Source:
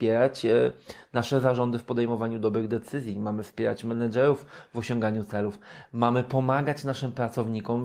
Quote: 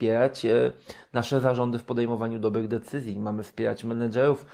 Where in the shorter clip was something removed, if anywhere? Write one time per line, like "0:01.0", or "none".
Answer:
none